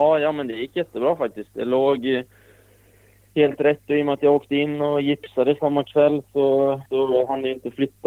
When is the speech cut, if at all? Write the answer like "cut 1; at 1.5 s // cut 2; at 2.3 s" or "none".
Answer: cut 1; at 6.9 s